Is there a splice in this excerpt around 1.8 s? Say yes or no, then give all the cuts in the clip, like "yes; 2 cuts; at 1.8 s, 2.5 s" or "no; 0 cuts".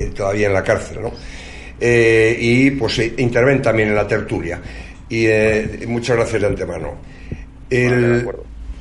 no; 0 cuts